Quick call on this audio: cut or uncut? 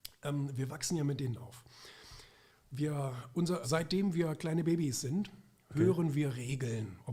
cut